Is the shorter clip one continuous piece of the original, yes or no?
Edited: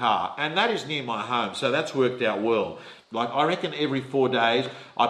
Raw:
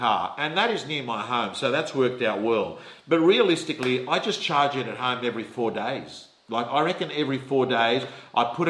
no